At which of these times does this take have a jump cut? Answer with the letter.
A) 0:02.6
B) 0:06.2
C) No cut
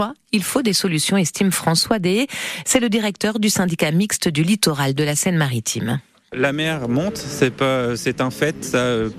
C